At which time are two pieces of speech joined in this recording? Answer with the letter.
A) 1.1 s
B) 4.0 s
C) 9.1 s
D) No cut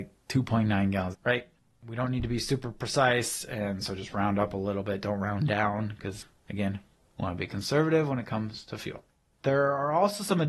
A